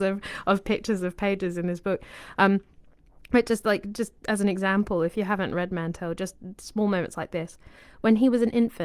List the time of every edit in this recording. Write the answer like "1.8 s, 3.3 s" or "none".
none